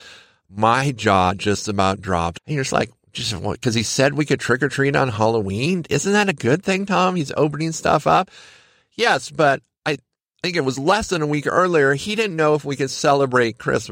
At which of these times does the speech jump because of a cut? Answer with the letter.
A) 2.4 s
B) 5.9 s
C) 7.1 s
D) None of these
A